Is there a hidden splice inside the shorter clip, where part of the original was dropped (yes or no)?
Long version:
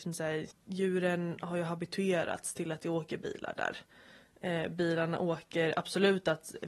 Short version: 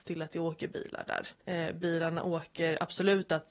yes